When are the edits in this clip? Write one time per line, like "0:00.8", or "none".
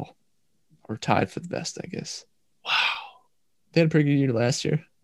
0:03.5